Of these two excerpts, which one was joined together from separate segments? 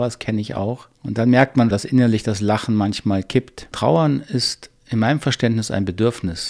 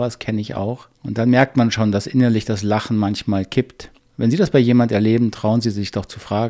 first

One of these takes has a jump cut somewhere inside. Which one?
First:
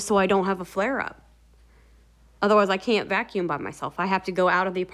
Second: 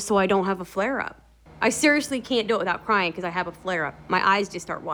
second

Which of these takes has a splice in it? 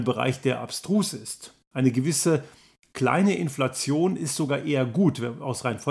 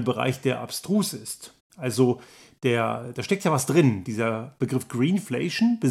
second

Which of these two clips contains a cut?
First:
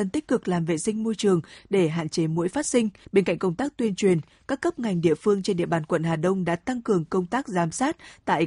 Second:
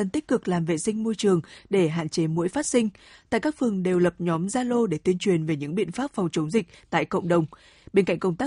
first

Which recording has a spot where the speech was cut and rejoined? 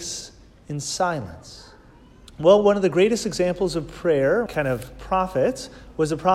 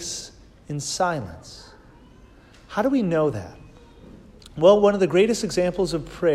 first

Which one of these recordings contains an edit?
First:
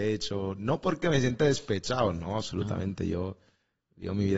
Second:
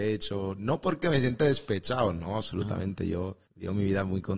second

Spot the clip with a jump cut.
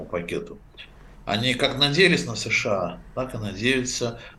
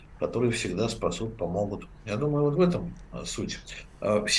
first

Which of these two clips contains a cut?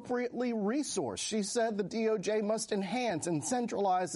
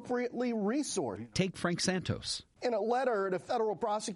second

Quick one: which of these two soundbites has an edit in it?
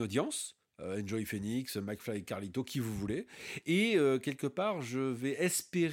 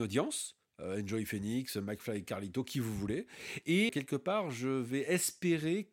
second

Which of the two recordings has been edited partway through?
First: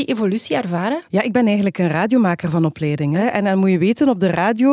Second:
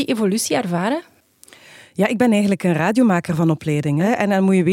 first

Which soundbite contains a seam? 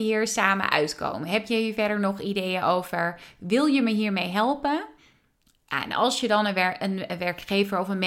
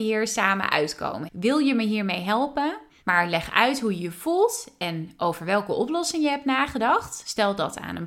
second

